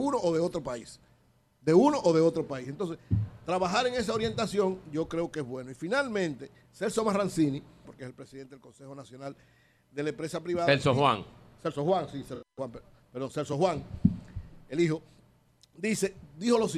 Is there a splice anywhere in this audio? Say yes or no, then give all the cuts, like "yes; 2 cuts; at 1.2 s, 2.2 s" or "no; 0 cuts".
yes; 1 cut; at 7.8 s